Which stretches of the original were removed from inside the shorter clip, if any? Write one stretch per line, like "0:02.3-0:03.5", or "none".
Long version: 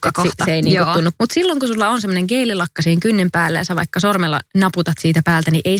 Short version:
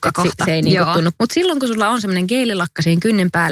none